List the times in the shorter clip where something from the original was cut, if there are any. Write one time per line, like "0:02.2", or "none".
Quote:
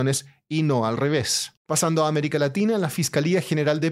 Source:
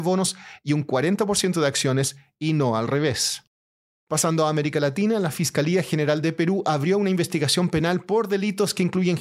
0:01.6